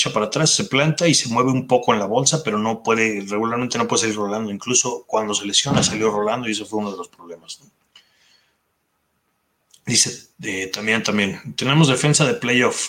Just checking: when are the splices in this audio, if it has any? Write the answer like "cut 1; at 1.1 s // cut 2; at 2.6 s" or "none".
none